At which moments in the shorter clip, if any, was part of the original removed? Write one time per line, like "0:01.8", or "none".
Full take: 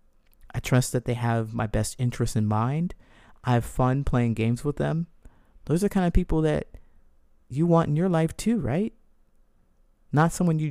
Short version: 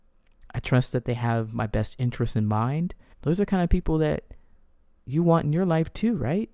0:03.1